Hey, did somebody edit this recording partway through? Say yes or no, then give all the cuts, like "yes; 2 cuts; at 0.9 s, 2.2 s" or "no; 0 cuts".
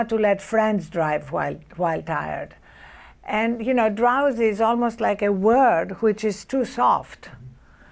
no; 0 cuts